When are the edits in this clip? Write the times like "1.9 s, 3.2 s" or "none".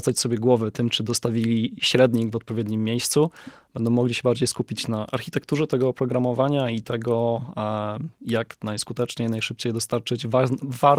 none